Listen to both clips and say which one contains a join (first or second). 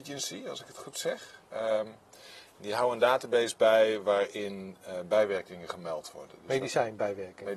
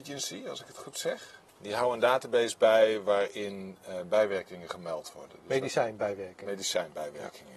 second